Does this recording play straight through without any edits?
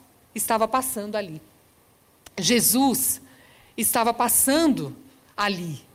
yes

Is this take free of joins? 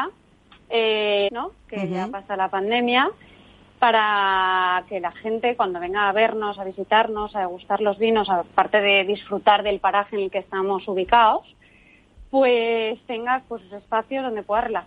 no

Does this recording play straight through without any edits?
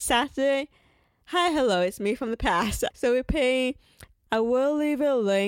no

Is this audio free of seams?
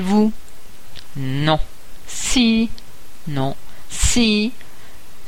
yes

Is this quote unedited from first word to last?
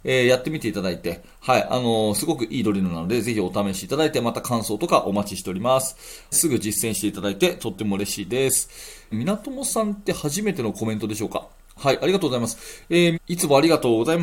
no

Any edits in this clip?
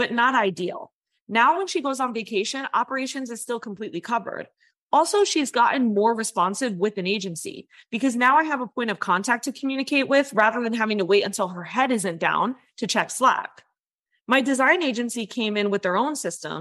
no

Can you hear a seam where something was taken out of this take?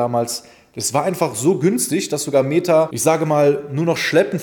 no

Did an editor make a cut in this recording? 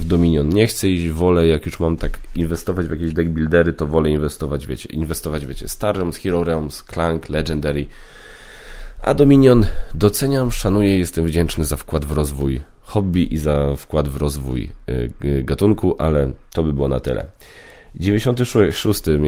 no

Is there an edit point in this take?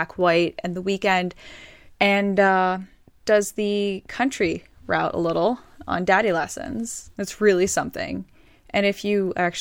yes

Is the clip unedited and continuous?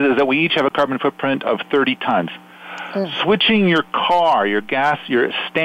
no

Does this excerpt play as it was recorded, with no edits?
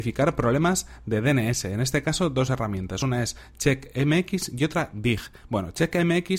yes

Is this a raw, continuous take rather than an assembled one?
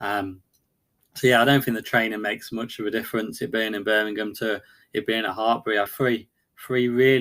no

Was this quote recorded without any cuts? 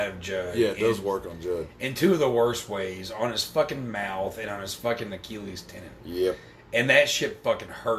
yes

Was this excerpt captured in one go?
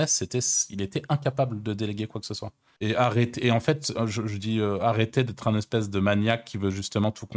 no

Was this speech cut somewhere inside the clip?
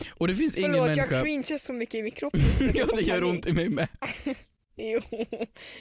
yes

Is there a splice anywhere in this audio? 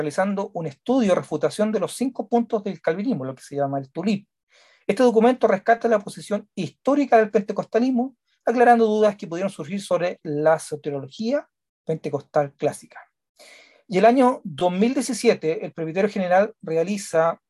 no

